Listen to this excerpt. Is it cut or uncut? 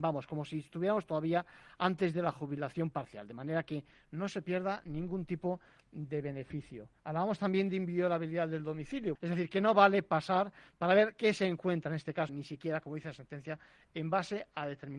cut